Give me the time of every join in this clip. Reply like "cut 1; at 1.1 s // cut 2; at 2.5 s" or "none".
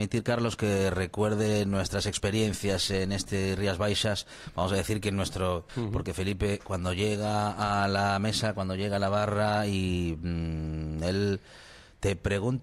cut 1; at 5.7 s